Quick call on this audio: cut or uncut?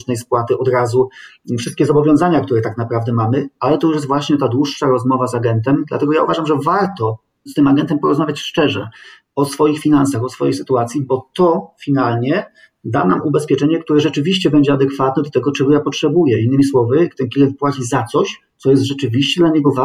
uncut